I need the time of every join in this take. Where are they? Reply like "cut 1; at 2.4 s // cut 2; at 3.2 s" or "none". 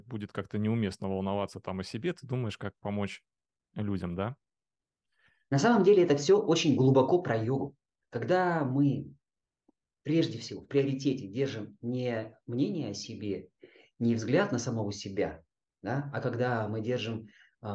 cut 1; at 8.0 s